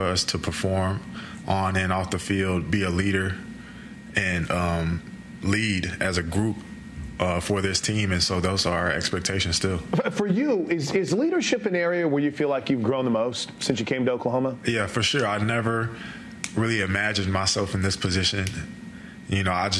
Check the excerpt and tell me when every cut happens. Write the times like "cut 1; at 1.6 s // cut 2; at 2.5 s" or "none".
none